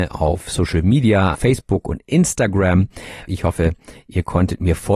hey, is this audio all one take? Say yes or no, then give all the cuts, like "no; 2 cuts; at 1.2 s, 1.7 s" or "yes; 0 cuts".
no; 2 cuts; at 1.3 s, 3.3 s